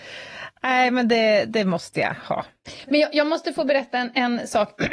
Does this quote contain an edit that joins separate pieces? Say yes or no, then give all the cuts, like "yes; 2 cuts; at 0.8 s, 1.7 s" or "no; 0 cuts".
no; 0 cuts